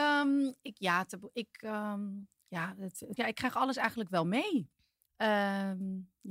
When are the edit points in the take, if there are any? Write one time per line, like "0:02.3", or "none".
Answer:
0:03.2
0:05.1